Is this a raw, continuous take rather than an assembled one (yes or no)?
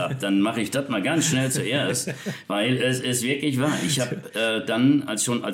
yes